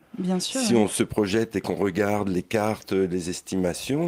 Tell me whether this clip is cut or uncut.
uncut